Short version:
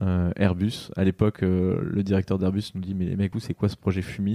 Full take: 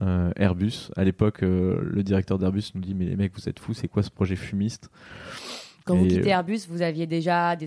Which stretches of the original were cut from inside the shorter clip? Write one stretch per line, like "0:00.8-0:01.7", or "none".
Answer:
0:03.3-0:03.7